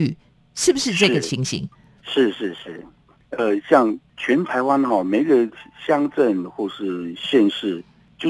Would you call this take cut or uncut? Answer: uncut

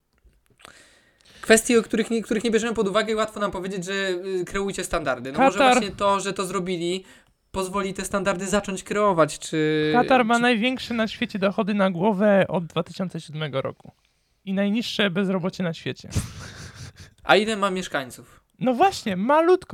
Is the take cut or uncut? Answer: uncut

